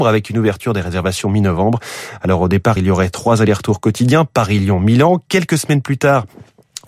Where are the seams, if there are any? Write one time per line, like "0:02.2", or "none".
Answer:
none